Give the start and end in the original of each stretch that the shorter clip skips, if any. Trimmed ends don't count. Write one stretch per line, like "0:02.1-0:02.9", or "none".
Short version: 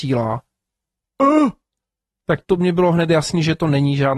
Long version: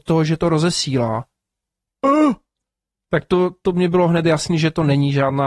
0:03.2-0:03.6